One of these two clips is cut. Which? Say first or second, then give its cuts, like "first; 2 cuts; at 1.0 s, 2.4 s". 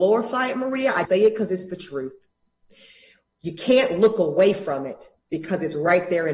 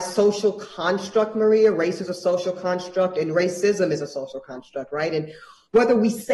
first; 1 cut; at 1.1 s